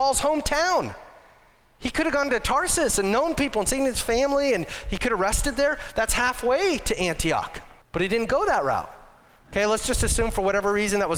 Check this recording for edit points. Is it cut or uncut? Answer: cut